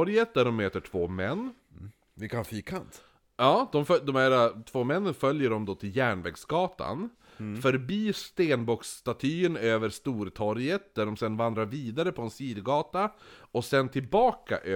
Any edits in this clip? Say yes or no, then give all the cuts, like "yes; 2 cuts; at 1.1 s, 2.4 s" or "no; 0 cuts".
no; 0 cuts